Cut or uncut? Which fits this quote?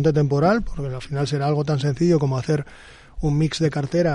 uncut